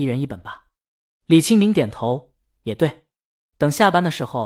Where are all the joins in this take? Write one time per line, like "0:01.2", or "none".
none